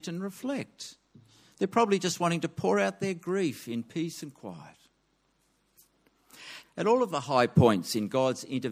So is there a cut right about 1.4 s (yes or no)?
no